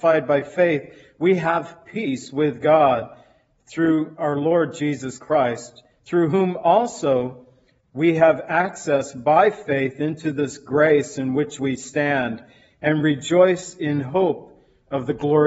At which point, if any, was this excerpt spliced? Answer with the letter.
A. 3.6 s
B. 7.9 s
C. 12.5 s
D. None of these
D